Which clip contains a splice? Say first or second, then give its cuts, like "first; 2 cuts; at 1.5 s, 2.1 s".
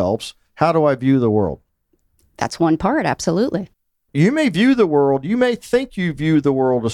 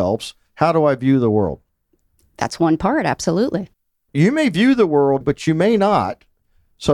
second; 1 cut; at 5.2 s